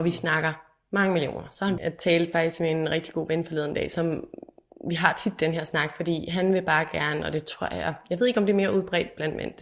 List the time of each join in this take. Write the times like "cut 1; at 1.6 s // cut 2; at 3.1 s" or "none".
cut 1; at 1.8 s